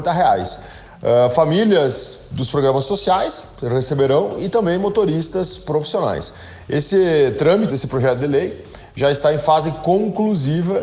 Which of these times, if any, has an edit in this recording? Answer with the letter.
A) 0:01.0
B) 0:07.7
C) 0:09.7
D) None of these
B